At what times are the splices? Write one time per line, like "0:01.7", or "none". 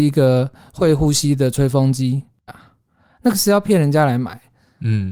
0:02.5